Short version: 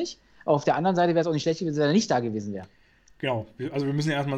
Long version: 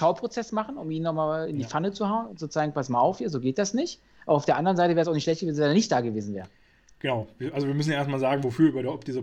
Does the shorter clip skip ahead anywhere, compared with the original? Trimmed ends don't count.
no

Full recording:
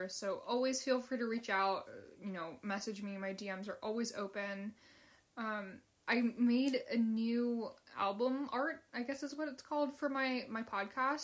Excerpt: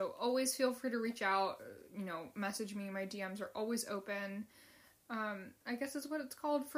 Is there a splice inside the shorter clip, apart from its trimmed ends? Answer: yes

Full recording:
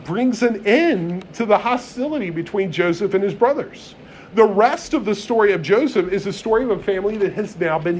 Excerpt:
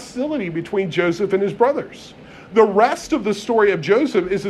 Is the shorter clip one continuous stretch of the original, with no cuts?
yes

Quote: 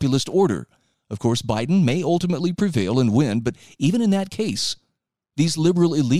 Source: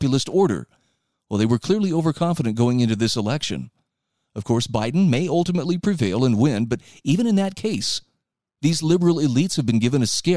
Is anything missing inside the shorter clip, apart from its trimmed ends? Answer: yes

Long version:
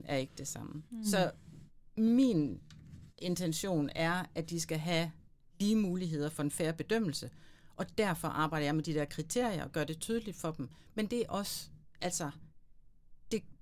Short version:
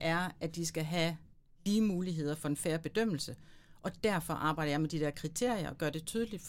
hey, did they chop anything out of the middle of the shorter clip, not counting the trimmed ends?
no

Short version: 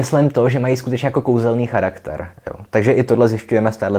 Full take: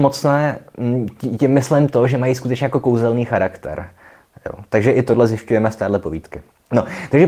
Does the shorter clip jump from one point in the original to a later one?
yes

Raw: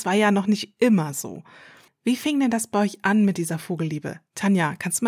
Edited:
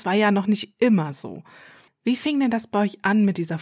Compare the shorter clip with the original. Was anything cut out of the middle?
no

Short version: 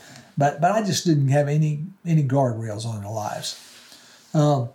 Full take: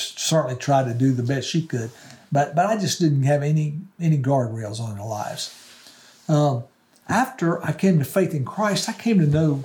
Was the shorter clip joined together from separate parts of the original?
no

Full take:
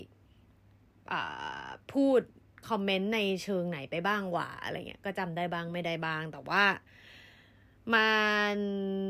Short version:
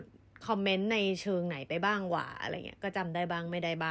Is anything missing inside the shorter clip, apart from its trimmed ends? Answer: no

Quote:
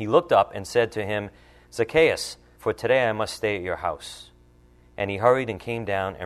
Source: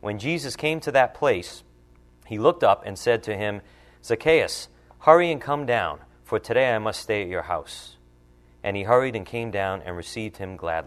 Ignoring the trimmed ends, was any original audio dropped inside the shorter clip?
yes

